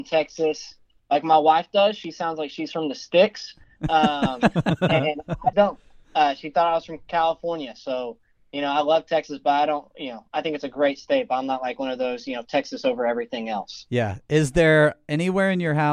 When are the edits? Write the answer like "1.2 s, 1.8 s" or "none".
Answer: 1.0 s, 5.5 s